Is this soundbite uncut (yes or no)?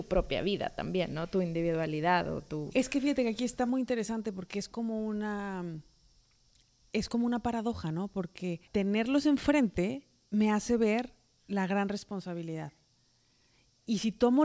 no